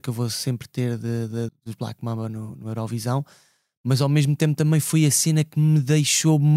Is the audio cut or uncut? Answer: cut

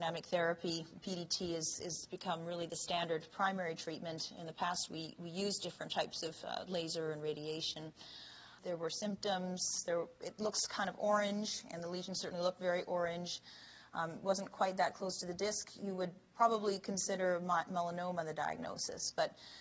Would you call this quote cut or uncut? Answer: cut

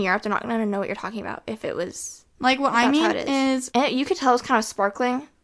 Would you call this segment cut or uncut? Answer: cut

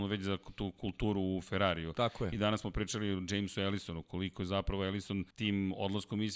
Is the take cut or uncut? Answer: cut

